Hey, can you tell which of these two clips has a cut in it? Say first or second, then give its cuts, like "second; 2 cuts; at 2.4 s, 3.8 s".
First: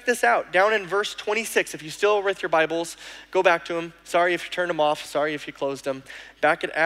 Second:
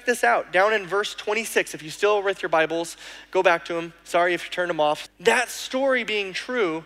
second; 1 cut; at 5.1 s